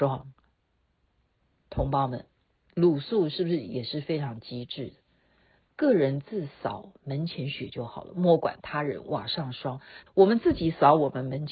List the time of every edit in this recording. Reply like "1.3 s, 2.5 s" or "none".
10.1 s